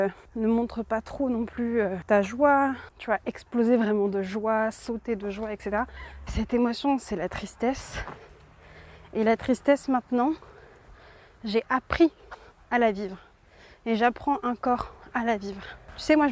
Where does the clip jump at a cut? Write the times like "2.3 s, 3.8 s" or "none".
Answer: 6.3 s